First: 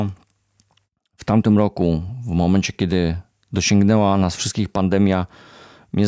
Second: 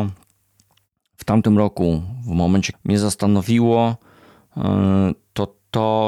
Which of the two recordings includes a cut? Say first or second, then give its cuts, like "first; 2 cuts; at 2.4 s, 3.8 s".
second; 1 cut; at 2.7 s